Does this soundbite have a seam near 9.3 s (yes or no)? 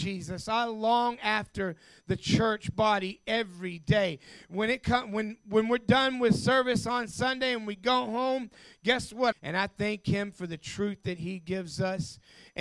yes